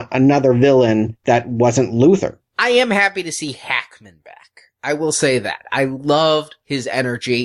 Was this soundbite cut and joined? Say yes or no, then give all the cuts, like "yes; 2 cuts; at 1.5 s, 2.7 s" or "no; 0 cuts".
no; 0 cuts